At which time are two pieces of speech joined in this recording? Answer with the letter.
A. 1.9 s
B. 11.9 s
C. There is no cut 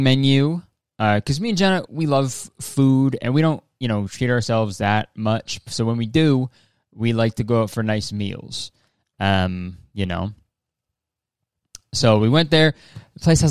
A